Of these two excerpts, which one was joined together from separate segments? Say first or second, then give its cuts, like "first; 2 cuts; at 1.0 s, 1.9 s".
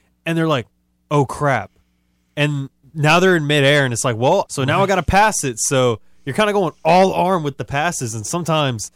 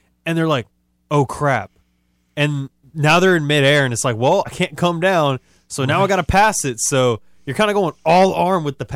first; 1 cut; at 4.4 s